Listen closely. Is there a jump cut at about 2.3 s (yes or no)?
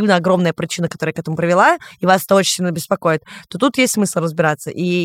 no